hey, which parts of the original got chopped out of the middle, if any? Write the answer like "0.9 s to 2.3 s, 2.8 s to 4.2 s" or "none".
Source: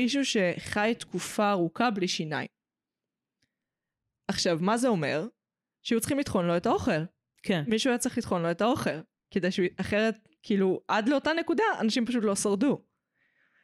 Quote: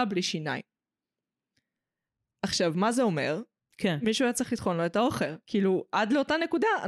5.4 s to 7.2 s, 9.1 s to 10.4 s